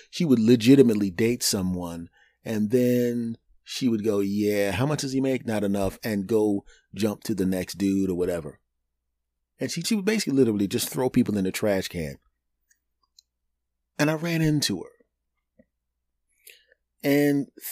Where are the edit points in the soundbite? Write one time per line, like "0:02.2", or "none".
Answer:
0:09.8

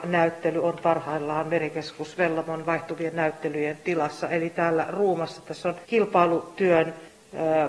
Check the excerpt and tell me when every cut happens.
0:05.8

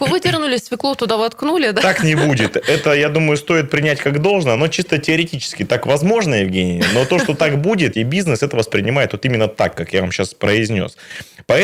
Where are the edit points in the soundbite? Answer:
0:07.9

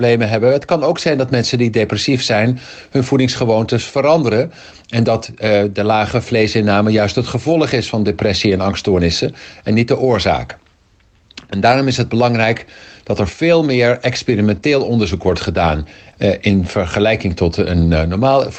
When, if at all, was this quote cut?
0:16.1

